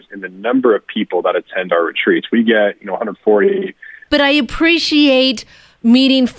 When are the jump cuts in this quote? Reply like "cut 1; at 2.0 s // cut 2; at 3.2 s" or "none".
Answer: cut 1; at 4.1 s